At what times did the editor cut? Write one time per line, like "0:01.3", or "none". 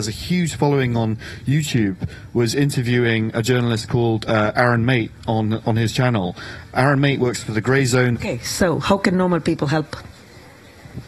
0:08.1